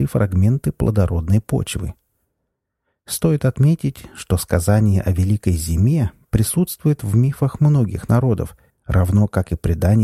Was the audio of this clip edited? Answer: yes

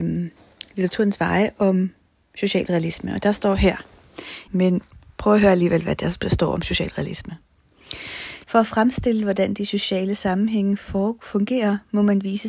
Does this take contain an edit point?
yes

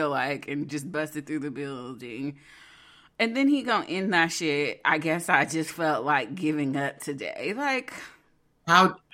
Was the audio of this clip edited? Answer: no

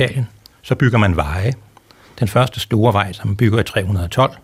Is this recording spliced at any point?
yes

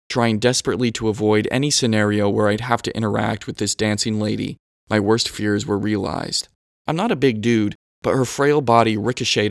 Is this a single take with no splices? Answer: no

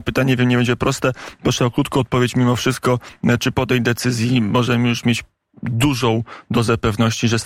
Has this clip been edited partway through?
no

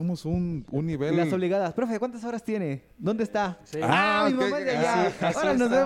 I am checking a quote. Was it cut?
no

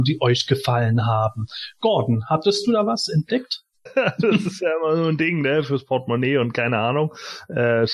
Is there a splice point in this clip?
yes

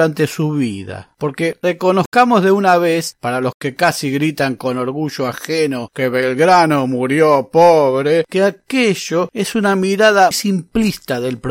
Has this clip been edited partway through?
yes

